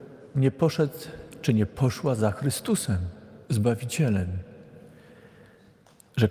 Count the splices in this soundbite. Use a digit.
1